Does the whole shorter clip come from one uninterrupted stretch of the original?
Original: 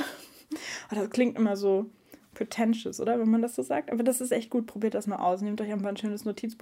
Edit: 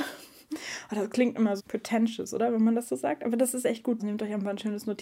no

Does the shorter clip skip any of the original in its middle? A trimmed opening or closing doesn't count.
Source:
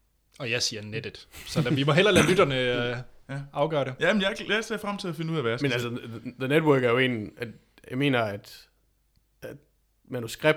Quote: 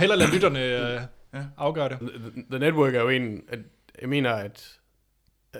yes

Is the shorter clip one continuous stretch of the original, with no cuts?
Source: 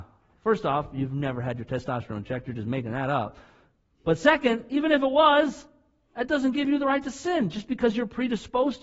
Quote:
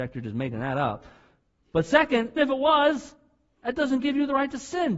no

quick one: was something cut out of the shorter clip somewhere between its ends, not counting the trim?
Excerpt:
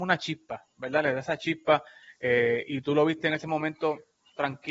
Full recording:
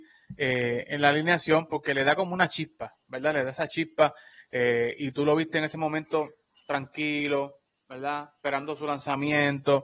no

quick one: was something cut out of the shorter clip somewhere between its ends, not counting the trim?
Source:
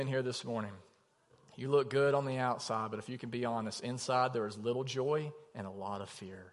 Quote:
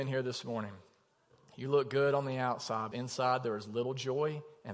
yes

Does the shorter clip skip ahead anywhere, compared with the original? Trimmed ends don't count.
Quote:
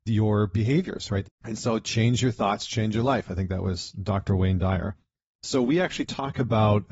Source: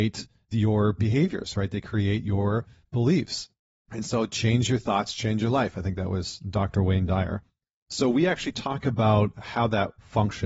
yes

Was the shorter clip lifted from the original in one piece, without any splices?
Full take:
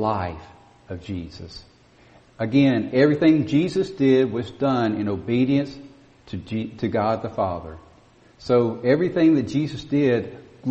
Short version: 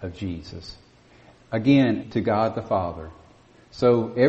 no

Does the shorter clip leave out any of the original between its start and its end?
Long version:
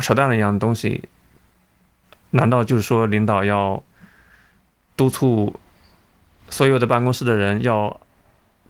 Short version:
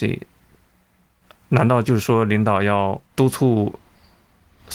yes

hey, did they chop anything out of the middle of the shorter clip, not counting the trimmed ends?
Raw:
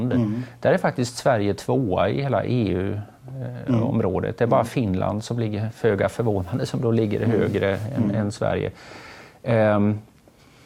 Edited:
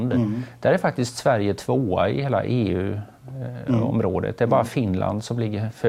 no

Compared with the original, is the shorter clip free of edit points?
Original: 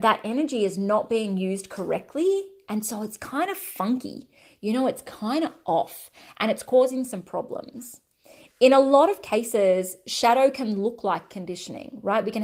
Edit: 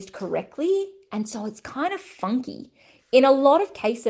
no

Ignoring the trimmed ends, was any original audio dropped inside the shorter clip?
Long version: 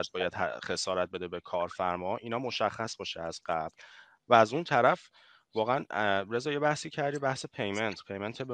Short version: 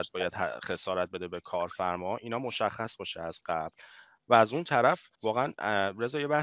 yes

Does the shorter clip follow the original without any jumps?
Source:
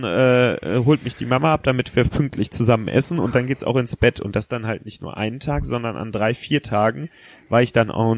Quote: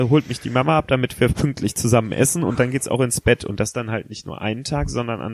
yes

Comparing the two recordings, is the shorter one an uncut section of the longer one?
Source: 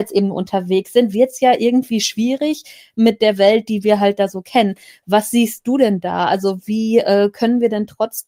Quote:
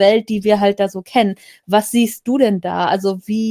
yes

